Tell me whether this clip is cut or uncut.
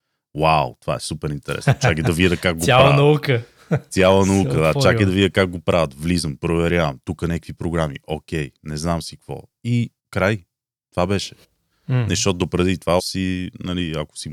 cut